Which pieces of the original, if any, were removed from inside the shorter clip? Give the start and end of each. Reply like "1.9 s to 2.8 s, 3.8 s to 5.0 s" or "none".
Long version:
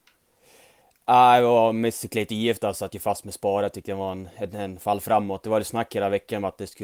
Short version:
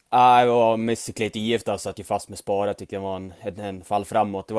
none